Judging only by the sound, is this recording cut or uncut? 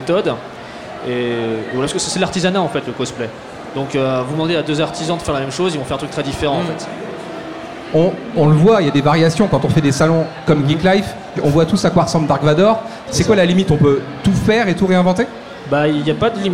cut